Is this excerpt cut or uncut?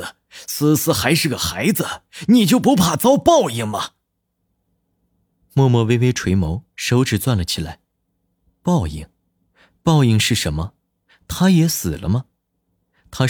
uncut